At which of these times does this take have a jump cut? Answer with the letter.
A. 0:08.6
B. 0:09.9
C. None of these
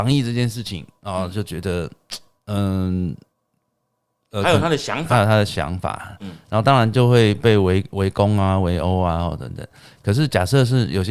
B